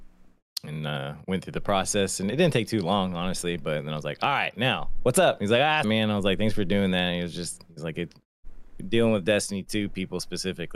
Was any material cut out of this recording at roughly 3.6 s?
no; 1 cut; at 5.8 s

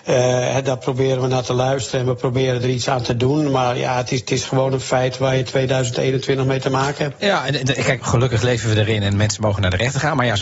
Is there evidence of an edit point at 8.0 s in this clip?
yes; 1 cut; at 8.0 s

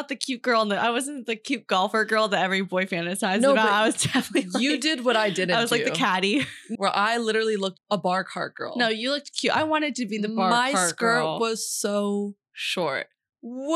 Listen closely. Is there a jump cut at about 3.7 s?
no; 2 cuts; at 6.7 s, 7.8 s

